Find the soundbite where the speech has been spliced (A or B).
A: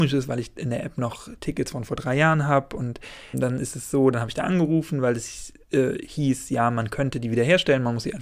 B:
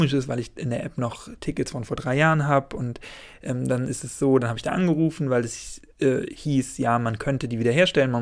A